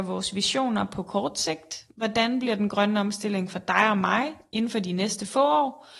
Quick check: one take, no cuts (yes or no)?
yes